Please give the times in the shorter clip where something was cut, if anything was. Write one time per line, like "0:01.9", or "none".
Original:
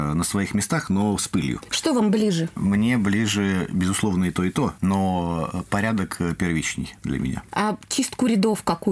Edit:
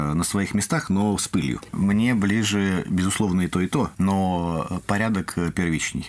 0:01.7